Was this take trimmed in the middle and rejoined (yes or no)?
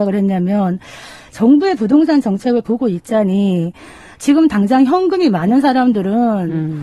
no